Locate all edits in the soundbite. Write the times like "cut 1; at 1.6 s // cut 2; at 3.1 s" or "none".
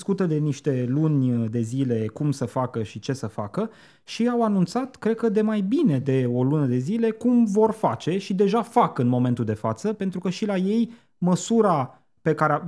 none